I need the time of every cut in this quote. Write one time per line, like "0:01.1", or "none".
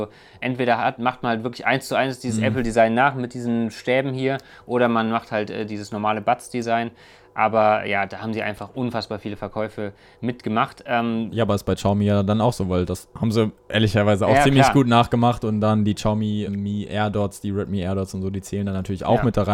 0:16.5